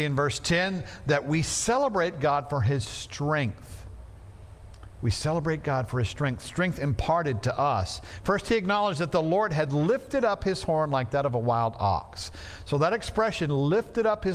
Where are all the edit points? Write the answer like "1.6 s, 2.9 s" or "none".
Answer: none